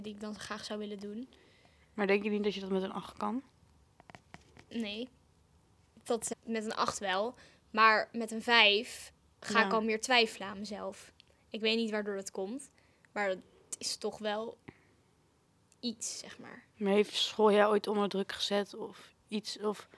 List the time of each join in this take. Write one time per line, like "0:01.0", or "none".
0:06.3